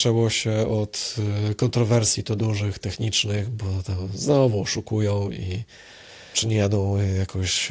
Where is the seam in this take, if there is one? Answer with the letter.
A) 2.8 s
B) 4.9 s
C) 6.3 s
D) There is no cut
C